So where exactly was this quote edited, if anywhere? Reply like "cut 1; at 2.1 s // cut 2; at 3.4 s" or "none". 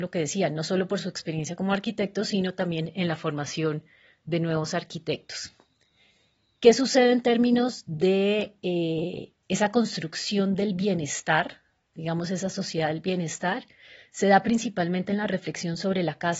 none